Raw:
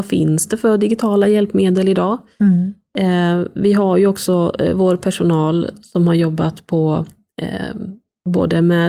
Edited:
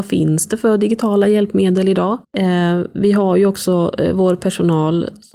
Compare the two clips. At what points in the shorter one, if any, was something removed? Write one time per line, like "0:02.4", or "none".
0:02.2